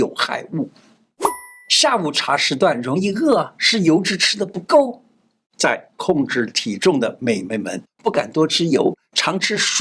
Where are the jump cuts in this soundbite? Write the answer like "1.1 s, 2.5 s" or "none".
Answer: 7.9 s